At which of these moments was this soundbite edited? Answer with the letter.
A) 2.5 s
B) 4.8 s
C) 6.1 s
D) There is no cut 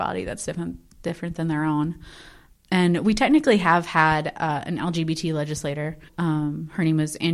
C